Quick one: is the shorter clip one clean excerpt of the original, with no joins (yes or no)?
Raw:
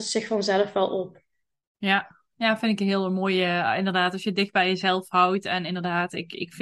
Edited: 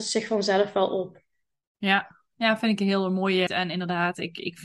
no